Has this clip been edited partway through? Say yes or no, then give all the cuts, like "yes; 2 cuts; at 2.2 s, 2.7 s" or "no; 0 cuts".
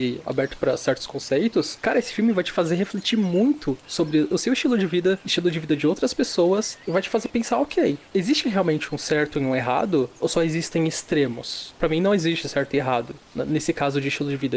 no; 0 cuts